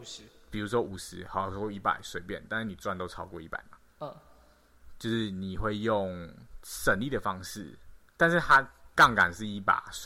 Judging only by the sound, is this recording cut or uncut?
uncut